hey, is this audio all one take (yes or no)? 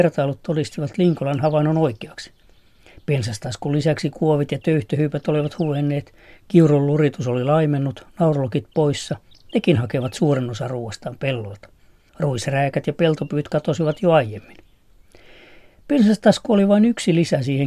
yes